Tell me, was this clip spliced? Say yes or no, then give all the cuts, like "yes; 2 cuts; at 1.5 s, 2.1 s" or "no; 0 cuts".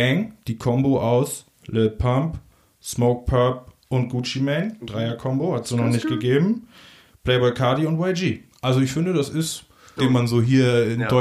yes; 1 cut; at 10.0 s